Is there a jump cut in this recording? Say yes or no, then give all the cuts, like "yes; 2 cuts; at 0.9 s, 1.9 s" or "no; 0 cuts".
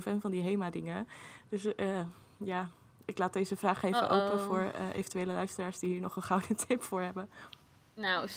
no; 0 cuts